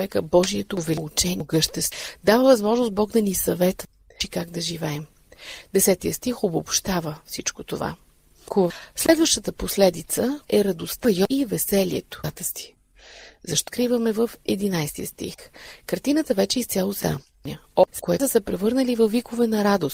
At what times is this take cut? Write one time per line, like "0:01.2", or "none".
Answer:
0:10.4
0:17.9

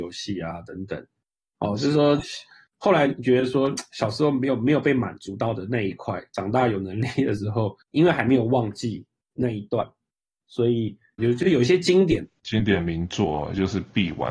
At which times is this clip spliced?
0:07.8
0:11.2
0:12.4

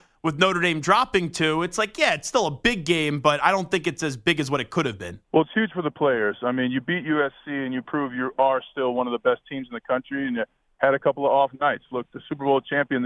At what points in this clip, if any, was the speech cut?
0:05.2

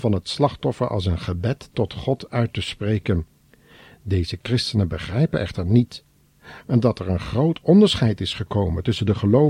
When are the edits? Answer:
none

